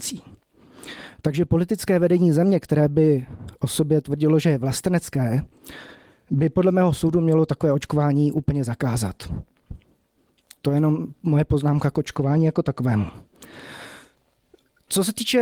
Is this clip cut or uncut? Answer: uncut